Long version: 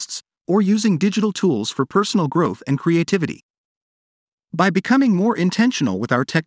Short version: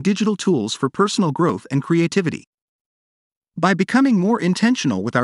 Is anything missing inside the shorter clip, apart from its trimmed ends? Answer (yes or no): no